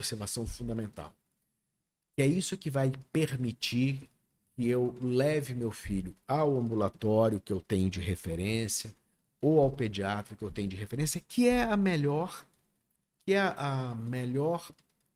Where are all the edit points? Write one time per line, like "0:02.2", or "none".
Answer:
none